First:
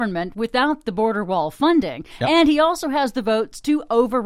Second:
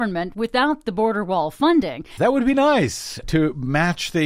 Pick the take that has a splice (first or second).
second